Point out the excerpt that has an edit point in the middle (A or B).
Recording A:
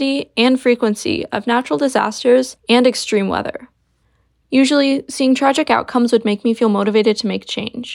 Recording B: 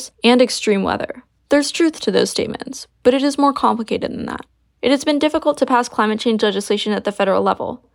B